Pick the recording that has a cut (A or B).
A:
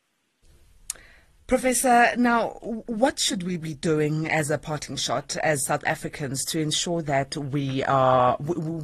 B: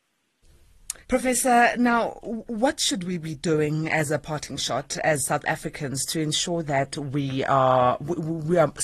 B